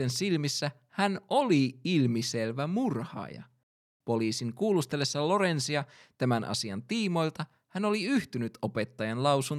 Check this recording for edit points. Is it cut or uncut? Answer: cut